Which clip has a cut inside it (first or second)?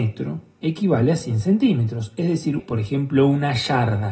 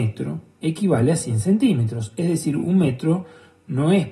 first